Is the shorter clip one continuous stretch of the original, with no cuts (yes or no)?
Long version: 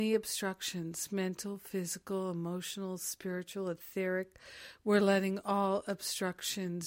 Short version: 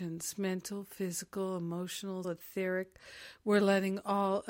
no